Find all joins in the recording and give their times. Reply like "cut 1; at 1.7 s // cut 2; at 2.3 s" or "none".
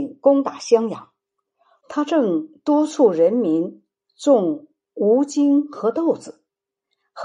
cut 1; at 1.8 s